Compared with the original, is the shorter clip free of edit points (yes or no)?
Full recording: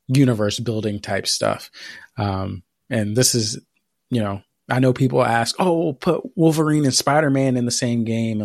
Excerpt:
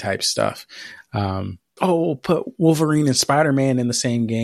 no